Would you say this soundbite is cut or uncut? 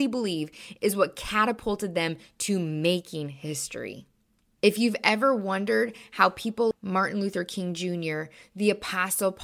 cut